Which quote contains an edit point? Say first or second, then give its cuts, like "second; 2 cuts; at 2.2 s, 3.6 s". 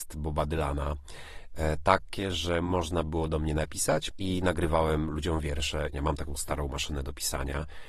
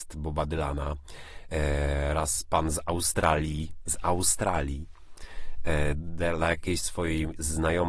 first; 3 cuts; at 1.5 s, 4.1 s, 5.9 s